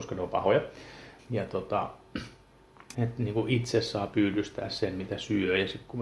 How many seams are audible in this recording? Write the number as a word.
two